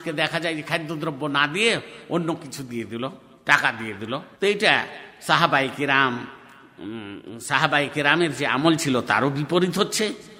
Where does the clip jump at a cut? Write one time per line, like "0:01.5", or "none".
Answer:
0:04.3